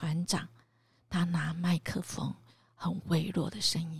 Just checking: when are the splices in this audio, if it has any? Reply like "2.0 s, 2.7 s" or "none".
none